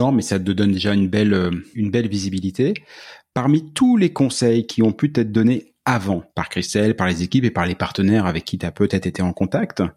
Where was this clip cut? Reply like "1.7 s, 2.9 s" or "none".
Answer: 1.7 s, 6.3 s

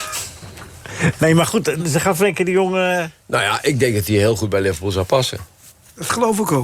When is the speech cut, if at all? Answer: 1.8 s

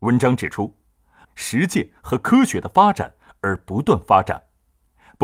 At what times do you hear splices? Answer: 1.2 s

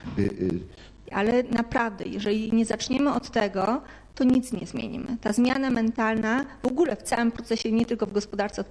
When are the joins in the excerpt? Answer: 1.1 s

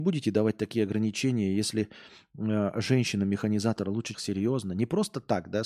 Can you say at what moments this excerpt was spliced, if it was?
4.1 s

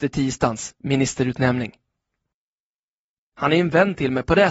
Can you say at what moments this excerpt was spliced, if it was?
3.3 s

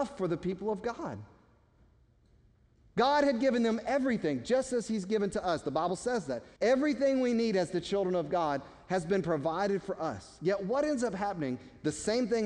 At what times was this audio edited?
6.6 s

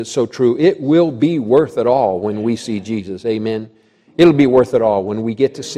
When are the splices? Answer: none

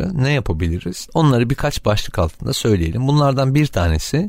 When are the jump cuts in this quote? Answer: 1.1 s

